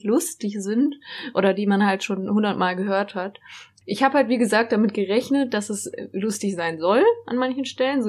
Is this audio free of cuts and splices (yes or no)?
yes